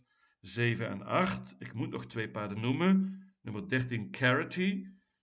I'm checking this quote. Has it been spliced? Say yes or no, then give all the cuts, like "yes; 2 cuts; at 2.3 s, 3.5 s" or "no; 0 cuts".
no; 0 cuts